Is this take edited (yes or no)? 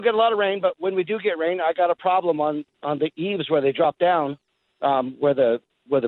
no